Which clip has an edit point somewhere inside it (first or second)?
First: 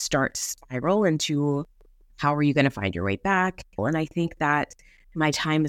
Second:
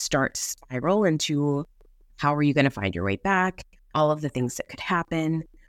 first